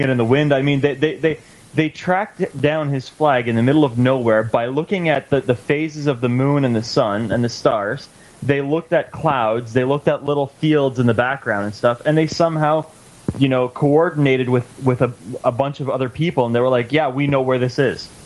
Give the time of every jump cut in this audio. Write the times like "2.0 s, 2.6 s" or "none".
none